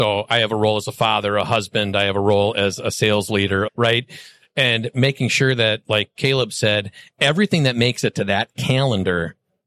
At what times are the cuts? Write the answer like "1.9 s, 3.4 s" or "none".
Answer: 3.7 s